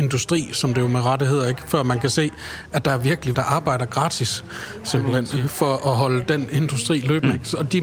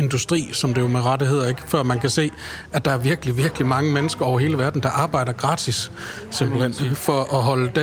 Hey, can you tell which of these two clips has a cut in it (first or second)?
first